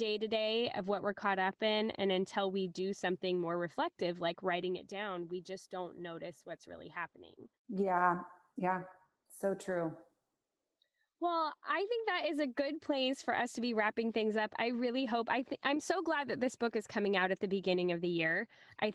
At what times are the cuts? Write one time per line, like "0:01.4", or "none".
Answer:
0:07.6